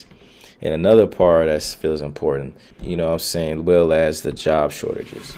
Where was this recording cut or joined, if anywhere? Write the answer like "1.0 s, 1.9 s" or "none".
2.7 s